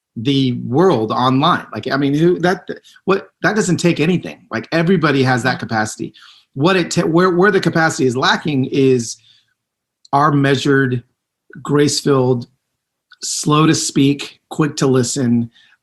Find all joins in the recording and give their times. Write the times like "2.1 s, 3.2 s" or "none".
none